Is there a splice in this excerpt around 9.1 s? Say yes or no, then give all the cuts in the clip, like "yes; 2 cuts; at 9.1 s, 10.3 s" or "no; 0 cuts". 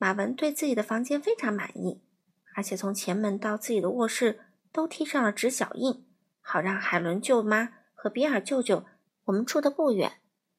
yes; 1 cut; at 9.1 s